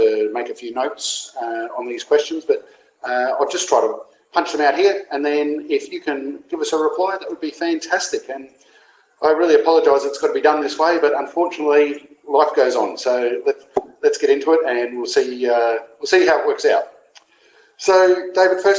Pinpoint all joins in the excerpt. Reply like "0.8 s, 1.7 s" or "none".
none